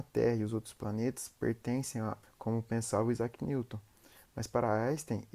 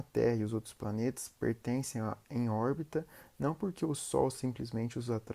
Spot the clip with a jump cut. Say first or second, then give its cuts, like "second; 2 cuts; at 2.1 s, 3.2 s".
first; 1 cut; at 2.2 s